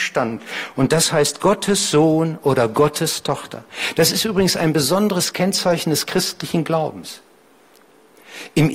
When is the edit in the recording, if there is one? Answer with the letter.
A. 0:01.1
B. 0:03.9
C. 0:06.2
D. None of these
D